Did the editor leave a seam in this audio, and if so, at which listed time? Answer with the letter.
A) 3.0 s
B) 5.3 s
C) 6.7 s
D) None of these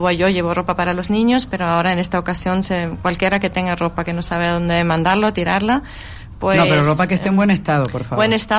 D